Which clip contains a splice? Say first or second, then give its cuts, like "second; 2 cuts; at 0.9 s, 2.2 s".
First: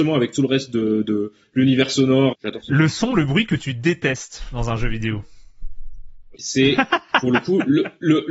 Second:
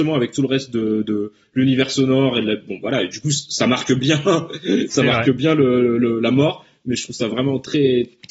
first; 2 cuts; at 2.3 s, 6.4 s